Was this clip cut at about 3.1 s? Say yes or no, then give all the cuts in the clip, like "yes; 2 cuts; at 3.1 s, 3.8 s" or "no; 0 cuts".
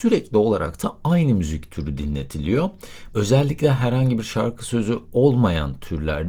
yes; 1 cut; at 3.1 s